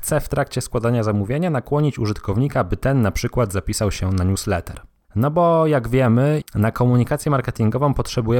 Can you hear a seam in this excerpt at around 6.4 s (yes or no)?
yes